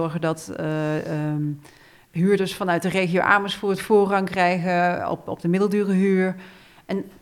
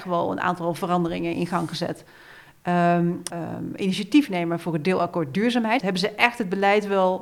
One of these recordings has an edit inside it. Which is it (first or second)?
second